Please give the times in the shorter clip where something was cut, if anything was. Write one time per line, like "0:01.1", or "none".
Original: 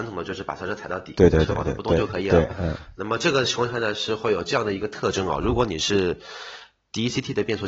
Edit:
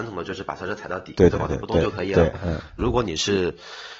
0:01.3
0:02.8